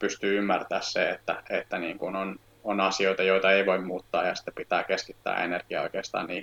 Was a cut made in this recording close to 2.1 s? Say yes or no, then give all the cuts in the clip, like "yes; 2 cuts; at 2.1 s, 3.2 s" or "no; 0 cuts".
no; 0 cuts